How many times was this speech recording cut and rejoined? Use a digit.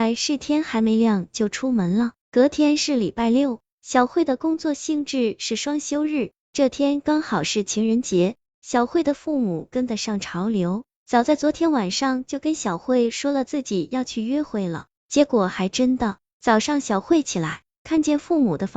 1